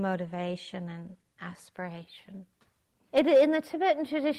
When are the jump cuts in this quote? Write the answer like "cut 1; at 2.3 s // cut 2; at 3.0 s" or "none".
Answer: cut 1; at 3.1 s